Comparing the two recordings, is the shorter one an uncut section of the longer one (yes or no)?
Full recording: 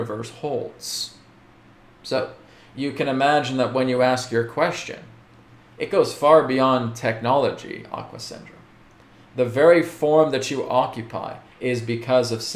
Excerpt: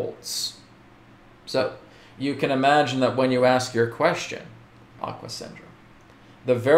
no